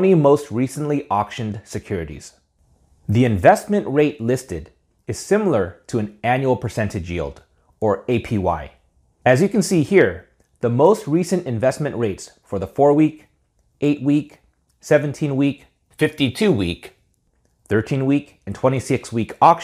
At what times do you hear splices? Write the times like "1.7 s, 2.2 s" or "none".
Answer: 3.0 s, 9.2 s